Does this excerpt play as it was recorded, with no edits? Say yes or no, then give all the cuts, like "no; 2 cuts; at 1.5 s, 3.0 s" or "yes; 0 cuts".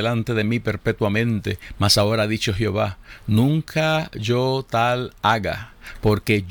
yes; 0 cuts